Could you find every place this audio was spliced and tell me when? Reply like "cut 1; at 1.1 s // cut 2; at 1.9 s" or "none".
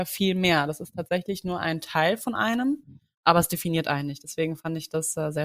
none

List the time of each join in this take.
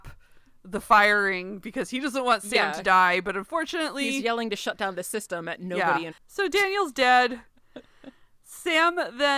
cut 1; at 6.1 s

